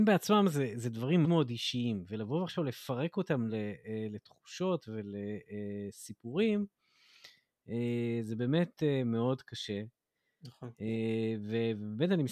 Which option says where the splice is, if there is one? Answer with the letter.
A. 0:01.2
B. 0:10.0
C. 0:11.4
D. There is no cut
A